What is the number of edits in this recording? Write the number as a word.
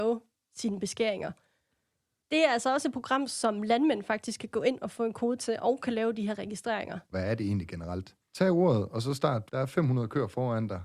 three